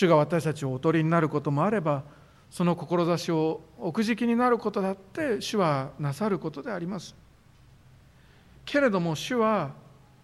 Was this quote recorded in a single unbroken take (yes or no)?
yes